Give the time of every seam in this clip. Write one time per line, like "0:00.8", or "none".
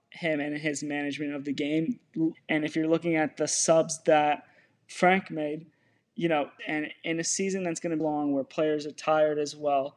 0:02.3
0:06.6
0:08.0